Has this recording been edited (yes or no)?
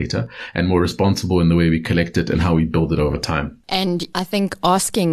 yes